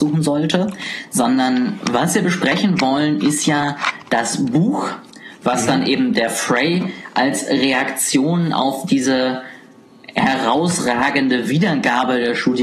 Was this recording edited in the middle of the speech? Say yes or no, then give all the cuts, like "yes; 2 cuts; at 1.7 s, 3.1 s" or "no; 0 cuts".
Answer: no; 0 cuts